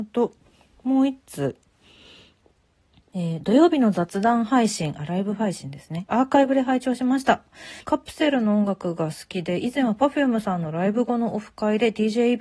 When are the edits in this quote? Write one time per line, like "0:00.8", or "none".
0:06.1
0:07.8